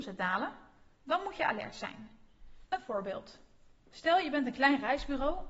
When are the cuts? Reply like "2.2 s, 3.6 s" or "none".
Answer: 2.7 s